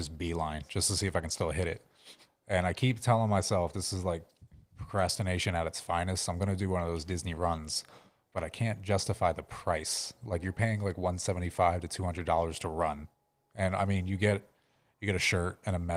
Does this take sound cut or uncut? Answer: uncut